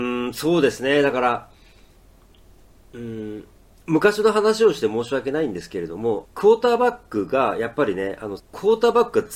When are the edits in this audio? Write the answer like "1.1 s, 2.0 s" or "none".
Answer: 6.2 s, 8.4 s